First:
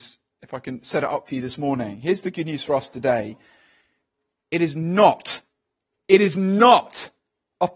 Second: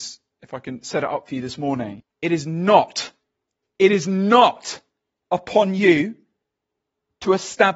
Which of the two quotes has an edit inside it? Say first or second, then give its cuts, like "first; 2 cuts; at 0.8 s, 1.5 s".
second; 1 cut; at 2.0 s